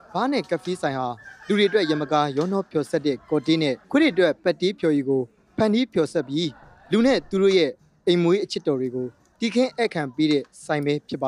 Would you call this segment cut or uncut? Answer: cut